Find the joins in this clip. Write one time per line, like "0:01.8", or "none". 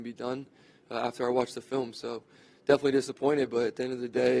none